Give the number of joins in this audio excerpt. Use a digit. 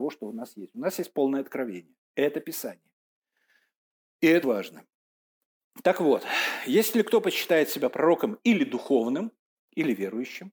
2